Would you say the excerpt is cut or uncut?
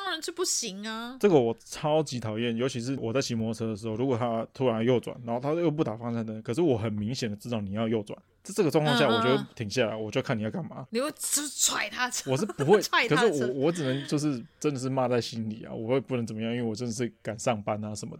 uncut